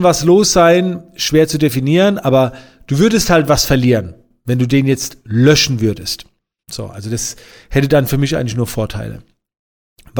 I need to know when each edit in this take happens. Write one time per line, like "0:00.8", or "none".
0:06.6